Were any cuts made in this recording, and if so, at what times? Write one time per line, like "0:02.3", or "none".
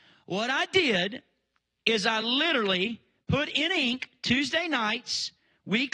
none